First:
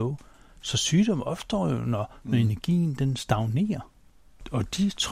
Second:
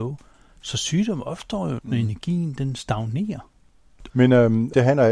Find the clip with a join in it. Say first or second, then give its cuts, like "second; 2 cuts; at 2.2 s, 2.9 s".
second; 2 cuts; at 1.8 s, 4.1 s